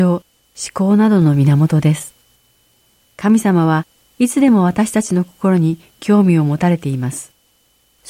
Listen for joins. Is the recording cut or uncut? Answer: uncut